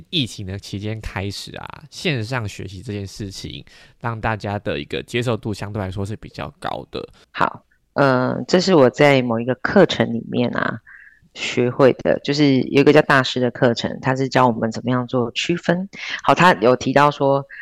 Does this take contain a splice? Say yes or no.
yes